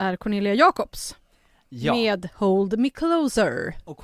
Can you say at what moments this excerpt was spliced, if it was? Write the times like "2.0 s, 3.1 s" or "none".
none